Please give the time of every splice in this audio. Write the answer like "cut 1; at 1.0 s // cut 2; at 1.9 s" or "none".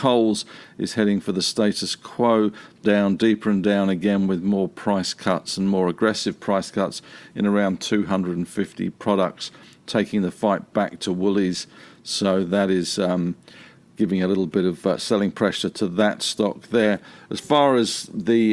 cut 1; at 2.8 s